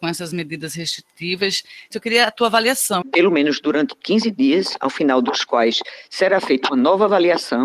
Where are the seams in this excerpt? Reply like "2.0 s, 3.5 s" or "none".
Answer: 1.9 s, 3.0 s